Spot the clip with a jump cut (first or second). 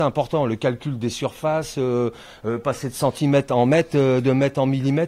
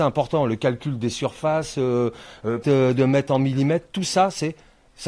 second